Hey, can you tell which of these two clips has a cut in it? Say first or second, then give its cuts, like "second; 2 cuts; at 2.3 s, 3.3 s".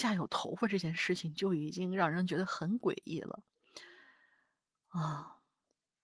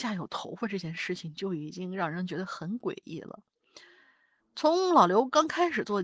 second; 1 cut; at 4.4 s